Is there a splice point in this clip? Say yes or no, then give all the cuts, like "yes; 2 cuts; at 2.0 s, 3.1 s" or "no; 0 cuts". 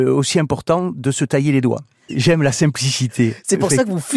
yes; 1 cut; at 2.1 s